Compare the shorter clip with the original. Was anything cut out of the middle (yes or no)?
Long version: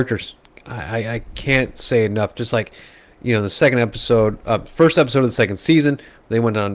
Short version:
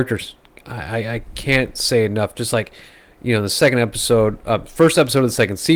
no